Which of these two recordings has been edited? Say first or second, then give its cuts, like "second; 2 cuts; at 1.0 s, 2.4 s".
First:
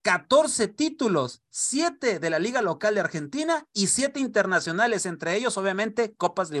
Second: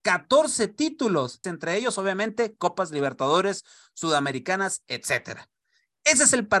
second; 1 cut; at 1.4 s